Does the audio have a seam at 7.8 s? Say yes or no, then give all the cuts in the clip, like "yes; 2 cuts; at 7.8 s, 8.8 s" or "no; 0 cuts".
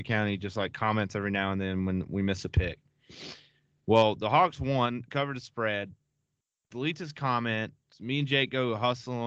yes; 1 cut; at 7.8 s